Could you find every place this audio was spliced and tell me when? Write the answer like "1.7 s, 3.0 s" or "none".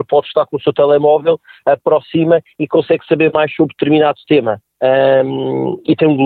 4.7 s